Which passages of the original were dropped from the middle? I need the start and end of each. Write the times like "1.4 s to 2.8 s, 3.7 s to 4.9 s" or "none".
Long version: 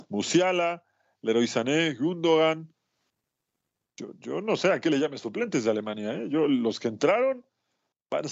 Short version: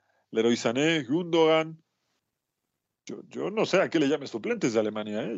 none

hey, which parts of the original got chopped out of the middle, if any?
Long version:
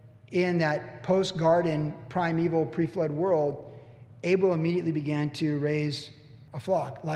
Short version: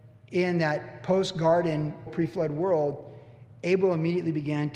2.1 s to 2.7 s

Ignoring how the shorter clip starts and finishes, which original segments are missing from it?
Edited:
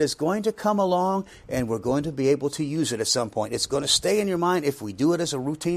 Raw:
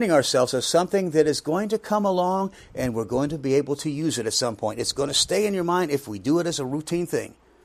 none

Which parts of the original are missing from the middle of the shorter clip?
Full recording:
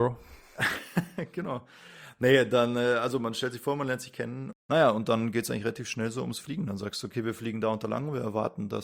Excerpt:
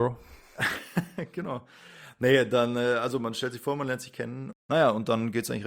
none

